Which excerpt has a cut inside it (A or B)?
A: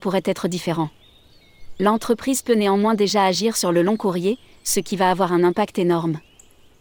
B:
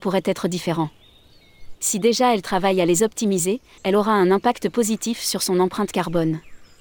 B